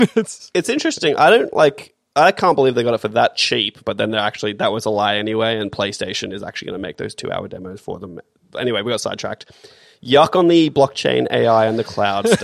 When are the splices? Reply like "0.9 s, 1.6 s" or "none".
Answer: 3.8 s